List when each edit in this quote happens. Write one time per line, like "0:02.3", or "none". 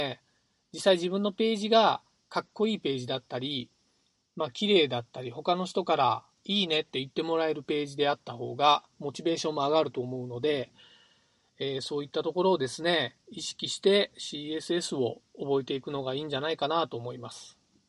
none